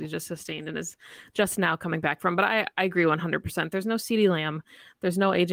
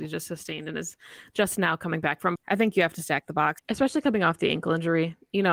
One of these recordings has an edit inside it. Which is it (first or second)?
second